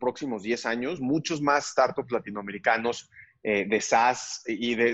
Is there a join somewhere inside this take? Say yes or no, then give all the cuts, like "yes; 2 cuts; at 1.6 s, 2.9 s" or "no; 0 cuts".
no; 0 cuts